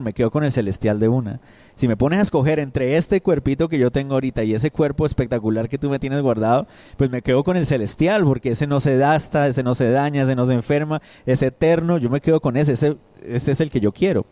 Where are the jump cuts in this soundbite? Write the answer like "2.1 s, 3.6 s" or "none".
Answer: none

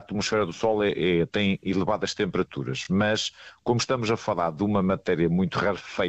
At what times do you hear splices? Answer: none

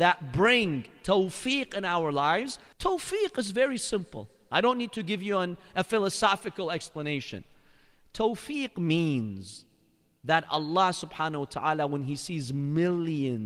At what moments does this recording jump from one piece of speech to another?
2.7 s

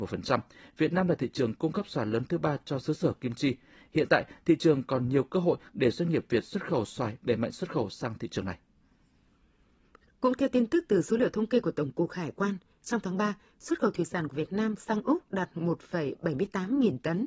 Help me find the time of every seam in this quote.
none

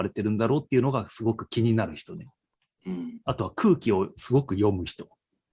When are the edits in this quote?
none

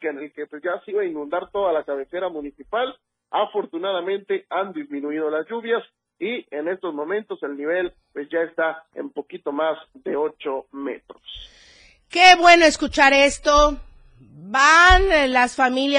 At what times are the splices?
none

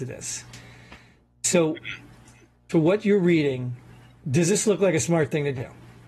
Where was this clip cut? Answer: 2.7 s

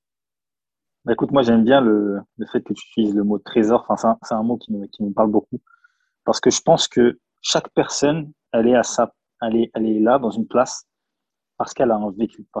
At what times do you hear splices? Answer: none

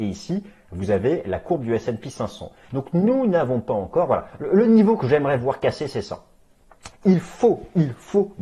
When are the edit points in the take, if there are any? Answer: 2.7 s, 6.9 s

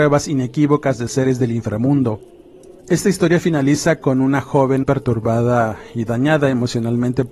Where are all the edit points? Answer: 2.8 s, 4.8 s

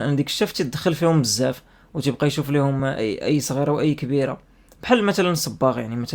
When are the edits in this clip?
none

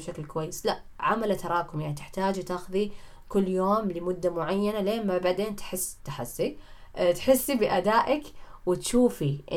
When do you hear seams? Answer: 6.0 s

